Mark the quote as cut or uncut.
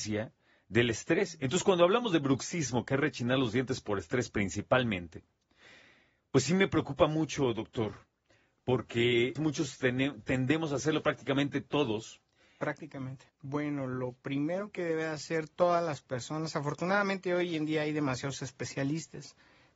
cut